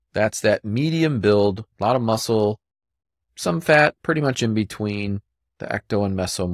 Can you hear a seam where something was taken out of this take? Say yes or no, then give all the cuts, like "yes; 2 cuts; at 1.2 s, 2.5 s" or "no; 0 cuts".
yes; 1 cut; at 3.9 s